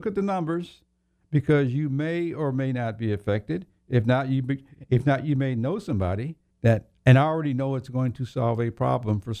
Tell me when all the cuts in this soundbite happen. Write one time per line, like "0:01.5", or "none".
0:06.5

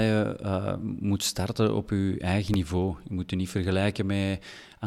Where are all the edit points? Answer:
none

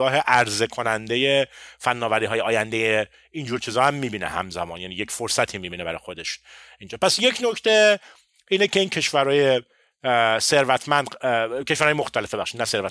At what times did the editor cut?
none

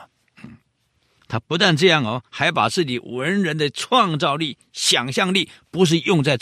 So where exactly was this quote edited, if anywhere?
0:01.2

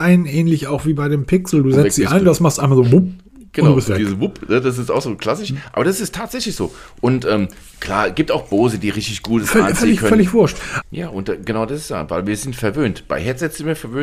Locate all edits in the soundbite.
0:10.8

